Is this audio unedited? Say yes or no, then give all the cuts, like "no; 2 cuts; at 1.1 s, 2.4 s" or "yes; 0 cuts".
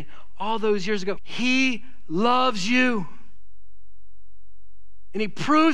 no; 1 cut; at 1.2 s